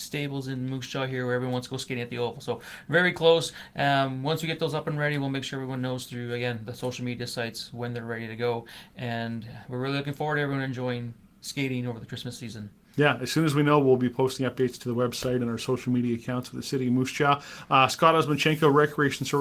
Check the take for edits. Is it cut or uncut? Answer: uncut